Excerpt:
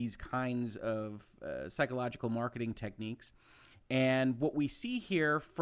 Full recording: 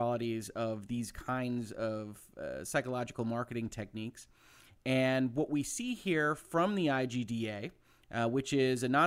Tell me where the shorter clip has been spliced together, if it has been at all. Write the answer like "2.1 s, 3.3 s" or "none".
none